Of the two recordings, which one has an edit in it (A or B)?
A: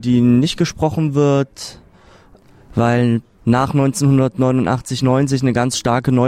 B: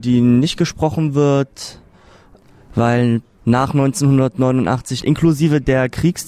B